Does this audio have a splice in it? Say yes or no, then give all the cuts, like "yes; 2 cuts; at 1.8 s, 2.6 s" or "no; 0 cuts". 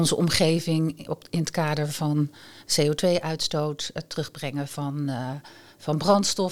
no; 0 cuts